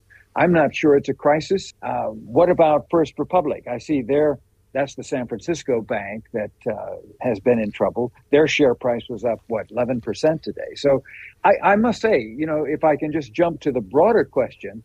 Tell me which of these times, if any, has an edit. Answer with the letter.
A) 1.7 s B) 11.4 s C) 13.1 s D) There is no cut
A